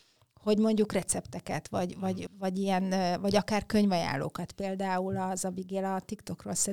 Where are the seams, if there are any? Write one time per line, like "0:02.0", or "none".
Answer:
0:02.3